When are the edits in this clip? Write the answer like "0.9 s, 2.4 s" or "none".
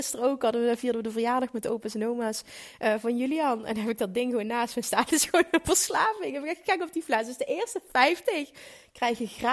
none